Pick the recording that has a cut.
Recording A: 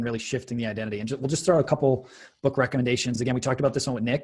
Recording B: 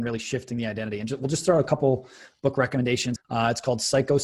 B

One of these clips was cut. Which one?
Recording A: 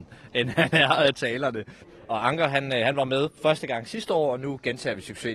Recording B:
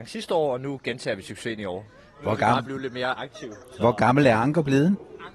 A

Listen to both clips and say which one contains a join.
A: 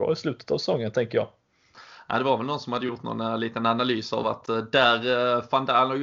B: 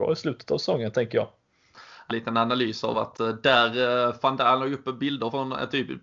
B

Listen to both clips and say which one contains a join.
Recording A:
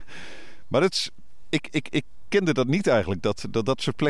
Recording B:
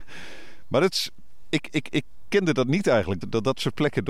B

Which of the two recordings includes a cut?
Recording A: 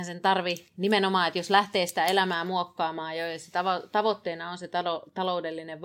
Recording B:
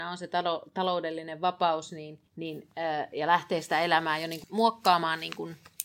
B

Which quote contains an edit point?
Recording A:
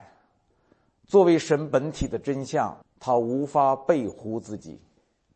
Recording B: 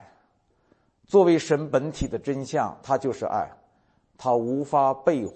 A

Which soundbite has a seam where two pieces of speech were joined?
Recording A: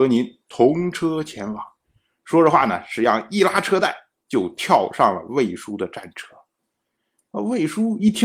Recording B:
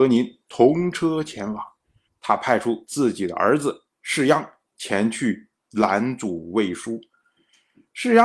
B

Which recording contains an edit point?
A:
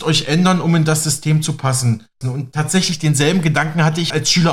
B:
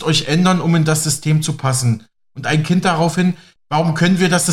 A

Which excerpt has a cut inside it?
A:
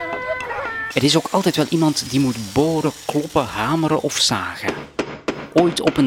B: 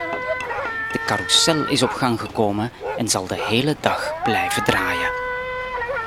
A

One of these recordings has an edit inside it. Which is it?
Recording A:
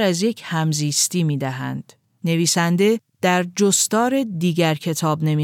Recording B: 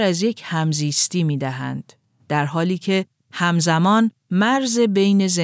A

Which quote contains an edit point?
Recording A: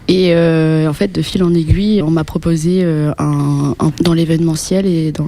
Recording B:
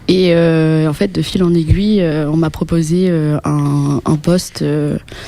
A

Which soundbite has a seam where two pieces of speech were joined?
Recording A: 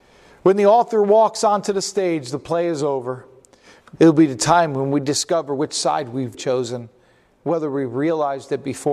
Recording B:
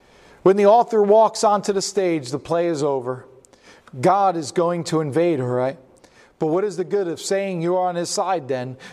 A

